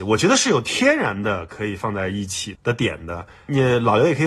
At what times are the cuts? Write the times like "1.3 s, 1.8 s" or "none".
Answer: 2.6 s